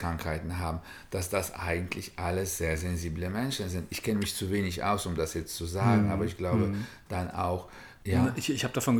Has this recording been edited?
no; 0 cuts

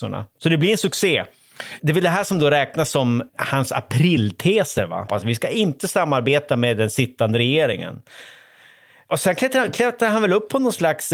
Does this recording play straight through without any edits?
no; 3 cuts; at 1.8 s, 3.3 s, 5.1 s

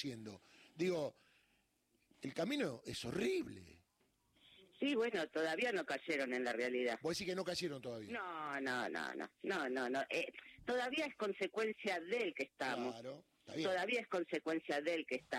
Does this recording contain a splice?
no; 0 cuts

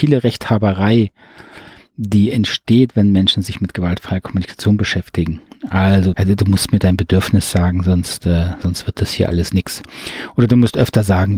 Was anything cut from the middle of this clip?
yes; 2 cuts; at 6.1 s, 8.6 s

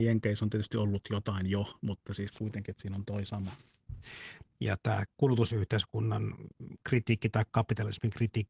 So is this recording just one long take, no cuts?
no; 1 cut; at 4.5 s

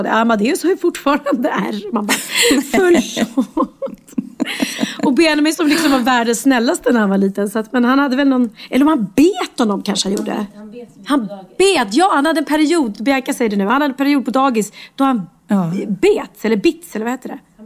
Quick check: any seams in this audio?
no; 0 cuts

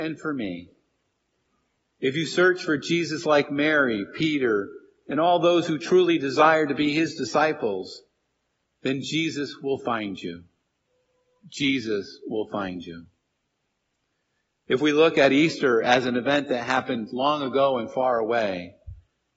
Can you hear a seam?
no; 0 cuts

